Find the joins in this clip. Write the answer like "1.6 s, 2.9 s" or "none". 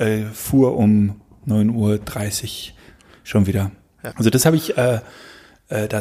4.1 s

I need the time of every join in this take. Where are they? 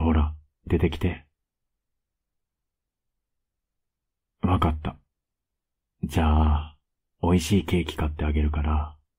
none

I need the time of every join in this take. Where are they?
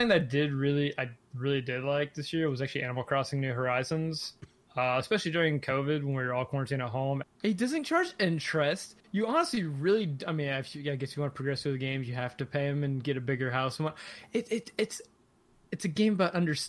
7.2 s

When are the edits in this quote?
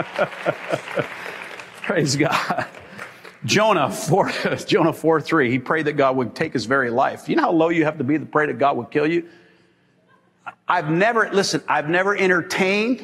none

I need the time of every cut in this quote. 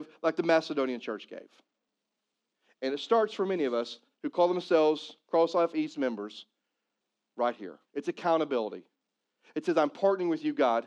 7.9 s

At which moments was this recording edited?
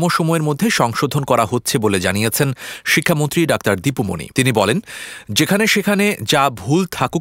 4.3 s

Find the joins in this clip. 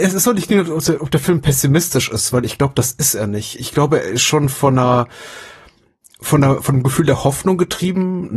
none

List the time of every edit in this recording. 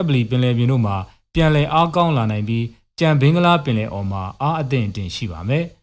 none

